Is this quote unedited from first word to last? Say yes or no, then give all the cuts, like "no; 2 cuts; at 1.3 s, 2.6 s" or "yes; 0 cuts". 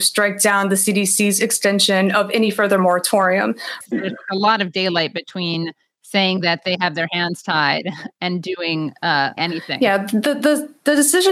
no; 2 cuts; at 3.8 s, 9.4 s